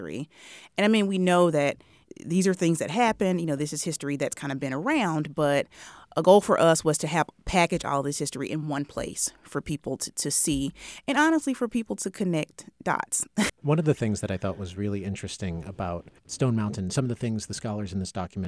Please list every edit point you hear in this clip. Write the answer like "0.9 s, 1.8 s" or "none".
13.5 s, 16.2 s